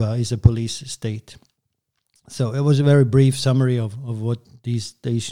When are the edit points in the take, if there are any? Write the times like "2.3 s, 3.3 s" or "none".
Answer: none